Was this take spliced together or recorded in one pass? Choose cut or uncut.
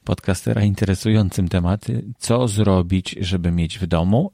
cut